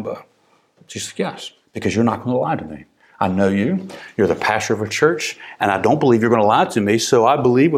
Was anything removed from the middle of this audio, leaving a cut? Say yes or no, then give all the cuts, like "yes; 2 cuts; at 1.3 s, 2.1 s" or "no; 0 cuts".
yes; 1 cut; at 1.6 s